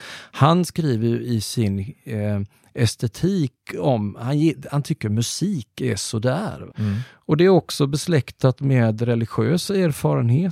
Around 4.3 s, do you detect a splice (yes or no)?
no